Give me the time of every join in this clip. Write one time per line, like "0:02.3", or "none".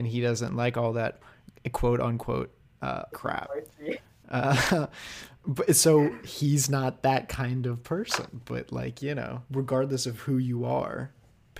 0:03.1
0:09.5